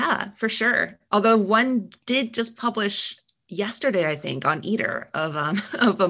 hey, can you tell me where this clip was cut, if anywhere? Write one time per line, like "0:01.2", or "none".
none

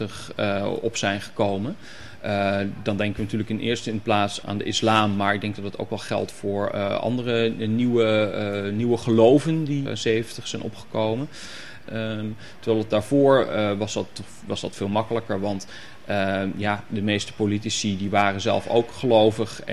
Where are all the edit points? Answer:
0:04.4
0:09.9
0:11.9

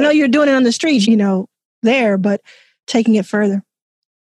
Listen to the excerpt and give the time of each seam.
0:01.0

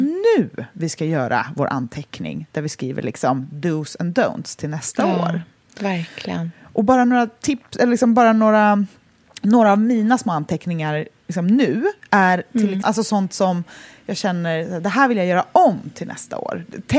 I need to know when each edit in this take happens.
0:12.8

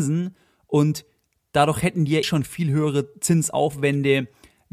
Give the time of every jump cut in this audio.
0:02.2

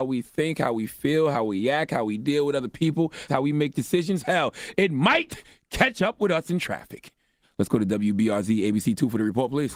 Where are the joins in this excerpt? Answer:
0:03.3
0:07.4

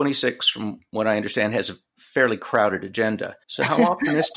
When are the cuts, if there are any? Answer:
0:03.4

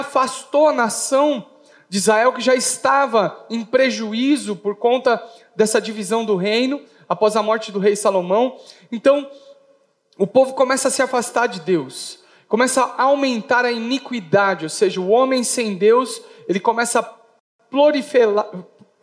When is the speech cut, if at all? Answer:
none

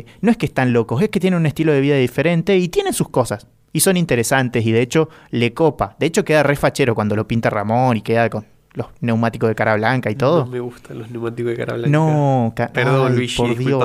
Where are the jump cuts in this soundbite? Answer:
none

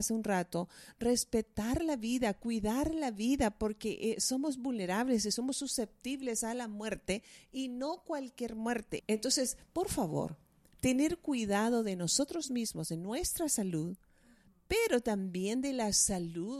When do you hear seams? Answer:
0:09.0

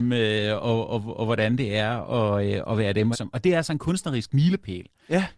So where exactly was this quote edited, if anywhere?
0:03.1

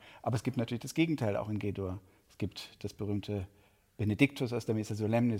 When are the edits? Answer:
none

